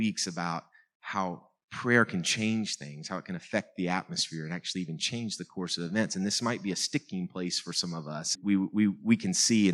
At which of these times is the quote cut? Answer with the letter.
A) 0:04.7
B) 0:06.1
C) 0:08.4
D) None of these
C